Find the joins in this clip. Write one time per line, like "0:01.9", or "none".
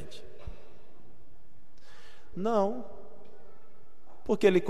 0:02.3

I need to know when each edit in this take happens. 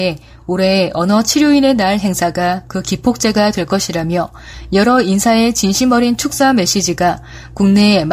none

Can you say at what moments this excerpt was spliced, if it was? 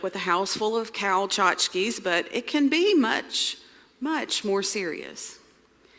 none

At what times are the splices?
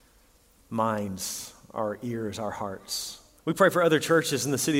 0:03.4

